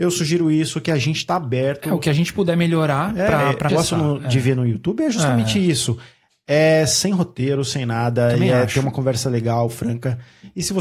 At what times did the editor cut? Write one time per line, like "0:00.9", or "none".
0:03.7

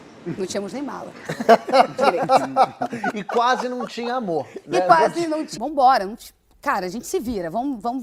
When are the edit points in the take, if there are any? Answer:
0:05.5

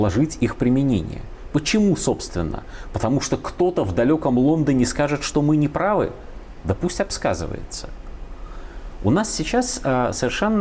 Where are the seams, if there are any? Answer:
none

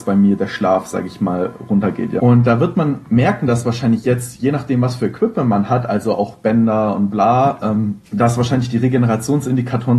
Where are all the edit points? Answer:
0:02.2
0:08.1

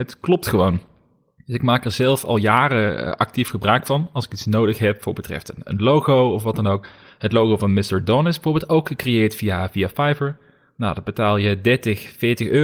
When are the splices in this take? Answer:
none

